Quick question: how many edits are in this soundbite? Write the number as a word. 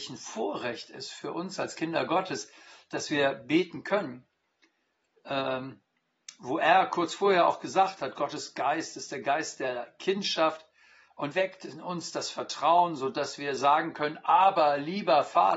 one